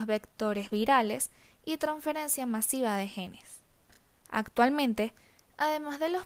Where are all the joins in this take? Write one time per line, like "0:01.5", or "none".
none